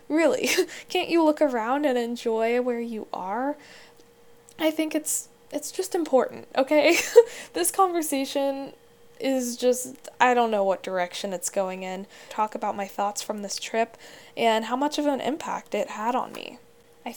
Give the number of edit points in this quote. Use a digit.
1